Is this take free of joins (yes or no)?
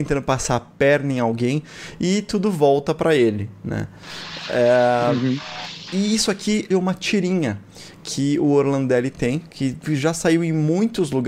no